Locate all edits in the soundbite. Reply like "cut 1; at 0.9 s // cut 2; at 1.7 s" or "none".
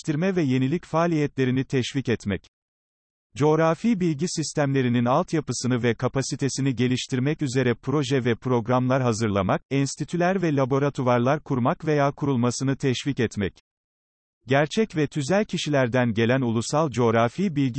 cut 1; at 9.7 s